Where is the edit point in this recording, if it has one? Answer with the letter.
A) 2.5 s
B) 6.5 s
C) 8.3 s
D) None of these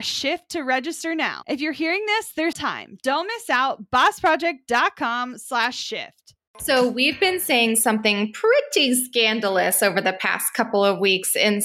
A